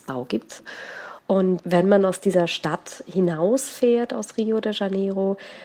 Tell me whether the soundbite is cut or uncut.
uncut